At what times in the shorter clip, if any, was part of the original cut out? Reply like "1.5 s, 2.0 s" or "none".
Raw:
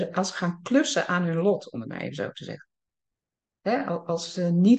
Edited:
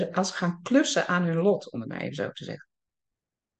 none